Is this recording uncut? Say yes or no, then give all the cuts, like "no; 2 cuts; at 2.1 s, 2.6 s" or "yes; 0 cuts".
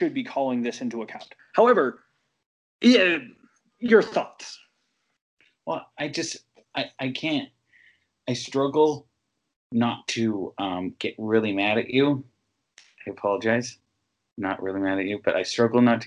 no; 1 cut; at 1.4 s